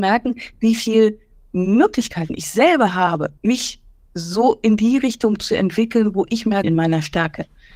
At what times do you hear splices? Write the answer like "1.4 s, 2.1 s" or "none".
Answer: 3.4 s, 6.6 s